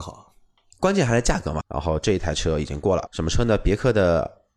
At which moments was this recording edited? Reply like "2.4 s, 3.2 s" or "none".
1.6 s, 3.1 s